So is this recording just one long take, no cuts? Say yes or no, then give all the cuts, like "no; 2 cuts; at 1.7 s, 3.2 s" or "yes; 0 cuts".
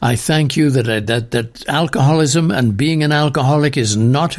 yes; 0 cuts